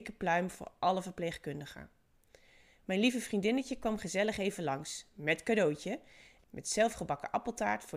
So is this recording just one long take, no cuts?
no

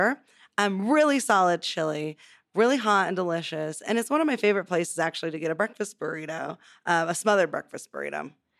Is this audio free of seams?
yes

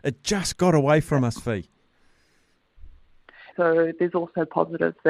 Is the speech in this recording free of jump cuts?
no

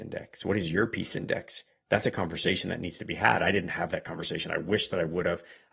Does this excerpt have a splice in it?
no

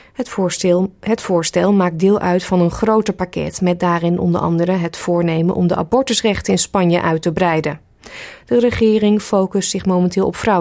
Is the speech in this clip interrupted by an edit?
no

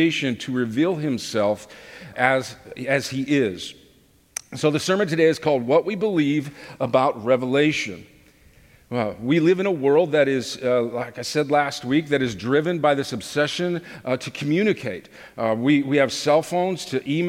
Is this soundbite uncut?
no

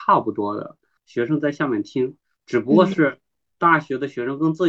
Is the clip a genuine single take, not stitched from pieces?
no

